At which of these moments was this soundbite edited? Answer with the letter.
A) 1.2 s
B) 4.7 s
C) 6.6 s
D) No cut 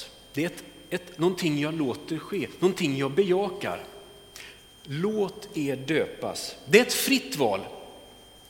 A